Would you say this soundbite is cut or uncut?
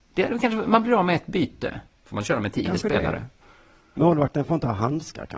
cut